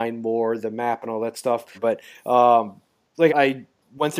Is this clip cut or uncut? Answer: cut